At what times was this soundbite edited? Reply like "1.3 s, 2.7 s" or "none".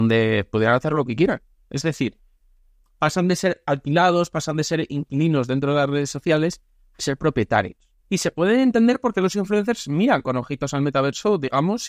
1.6 s, 8.0 s